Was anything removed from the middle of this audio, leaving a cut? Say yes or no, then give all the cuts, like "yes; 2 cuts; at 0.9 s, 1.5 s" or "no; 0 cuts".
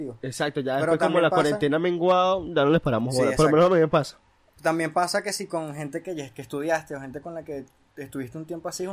no; 0 cuts